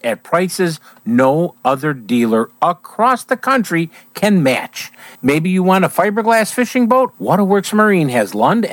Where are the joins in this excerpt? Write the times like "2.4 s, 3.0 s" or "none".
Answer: 5.2 s, 7.1 s